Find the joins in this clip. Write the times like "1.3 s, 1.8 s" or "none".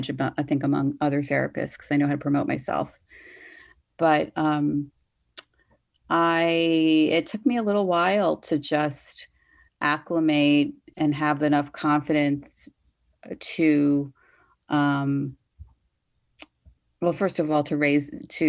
none